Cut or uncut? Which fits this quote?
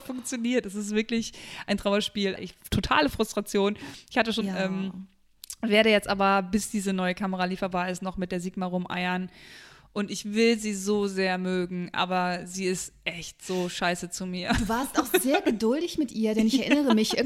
cut